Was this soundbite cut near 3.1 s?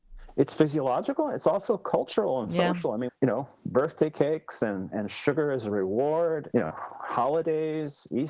yes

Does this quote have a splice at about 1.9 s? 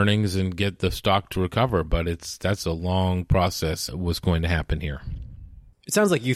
no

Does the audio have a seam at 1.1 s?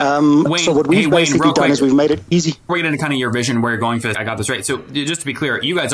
no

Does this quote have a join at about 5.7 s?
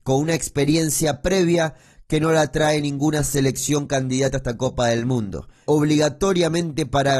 yes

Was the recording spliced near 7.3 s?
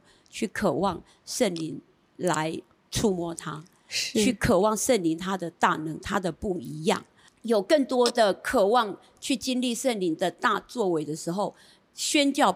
yes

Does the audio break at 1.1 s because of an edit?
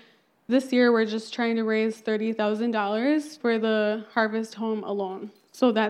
no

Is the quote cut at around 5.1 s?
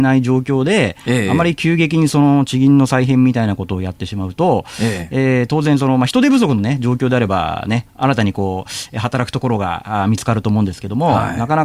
no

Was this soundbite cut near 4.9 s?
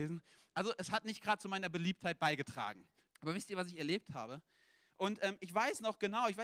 yes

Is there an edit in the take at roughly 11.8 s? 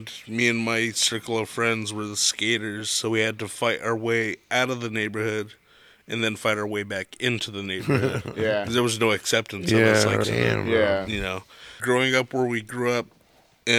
yes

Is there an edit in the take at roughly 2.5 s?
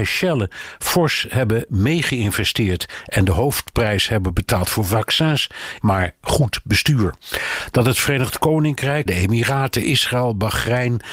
no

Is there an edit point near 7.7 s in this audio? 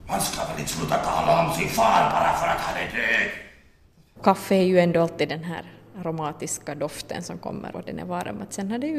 yes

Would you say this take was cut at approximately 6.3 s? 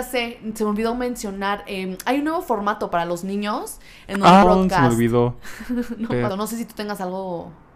yes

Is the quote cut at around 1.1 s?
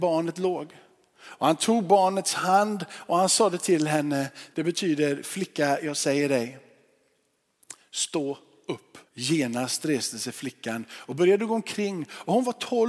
no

